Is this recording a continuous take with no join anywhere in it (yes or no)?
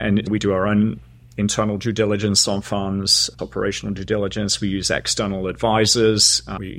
no